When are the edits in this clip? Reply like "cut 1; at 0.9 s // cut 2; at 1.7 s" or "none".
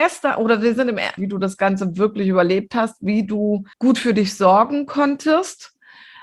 cut 1; at 1.2 s // cut 2; at 3.7 s

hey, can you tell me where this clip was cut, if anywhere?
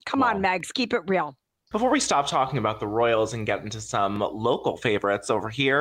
cut 1; at 1.7 s

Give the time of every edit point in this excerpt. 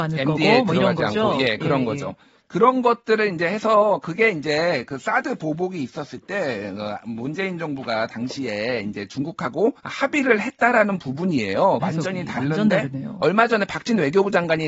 cut 1; at 9.8 s // cut 2; at 11.8 s

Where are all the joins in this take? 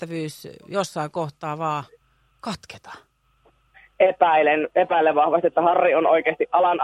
none

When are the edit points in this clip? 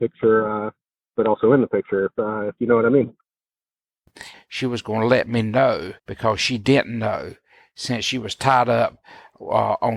cut 1; at 4.3 s // cut 2; at 6.0 s

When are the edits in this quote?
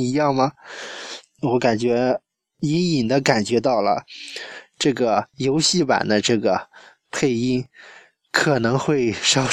none

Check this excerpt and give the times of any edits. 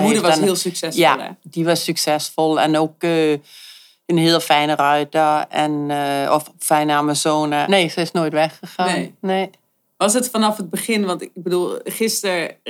cut 1; at 7.6 s

